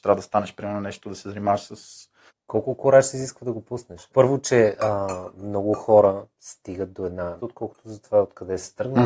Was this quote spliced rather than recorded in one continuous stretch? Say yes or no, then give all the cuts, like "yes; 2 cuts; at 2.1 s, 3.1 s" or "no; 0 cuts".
yes; 3 cuts; at 2.3 s, 4.1 s, 7.4 s